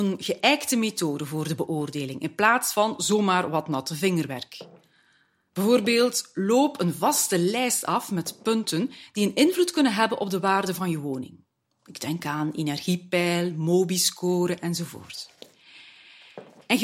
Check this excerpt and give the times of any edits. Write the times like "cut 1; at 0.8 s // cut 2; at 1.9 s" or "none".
none